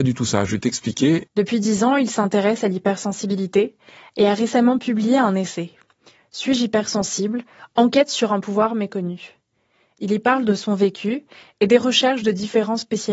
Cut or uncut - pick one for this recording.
cut